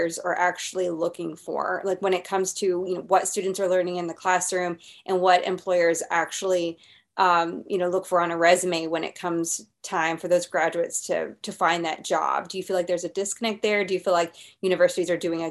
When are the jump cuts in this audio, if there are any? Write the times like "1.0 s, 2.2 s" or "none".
none